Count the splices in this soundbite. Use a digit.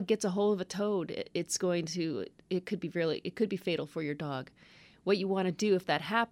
0